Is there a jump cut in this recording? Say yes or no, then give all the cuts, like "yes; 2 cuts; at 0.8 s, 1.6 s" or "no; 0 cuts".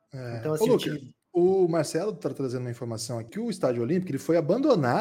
yes; 2 cuts; at 1.2 s, 3.3 s